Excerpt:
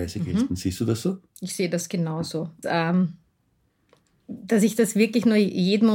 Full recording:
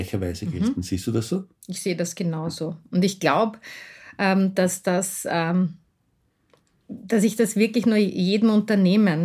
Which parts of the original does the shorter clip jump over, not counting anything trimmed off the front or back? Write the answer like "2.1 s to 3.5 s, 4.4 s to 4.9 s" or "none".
2.9 s to 5.2 s